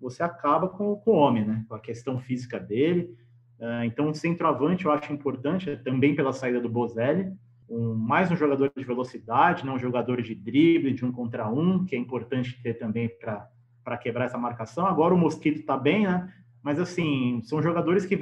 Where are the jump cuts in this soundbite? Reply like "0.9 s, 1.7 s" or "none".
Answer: 7.6 s